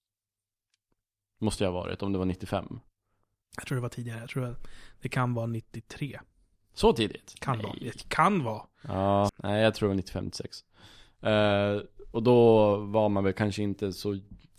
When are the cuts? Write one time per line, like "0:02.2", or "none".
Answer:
0:09.3